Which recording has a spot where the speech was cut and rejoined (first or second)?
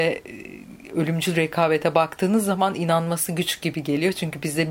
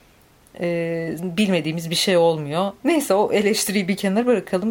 second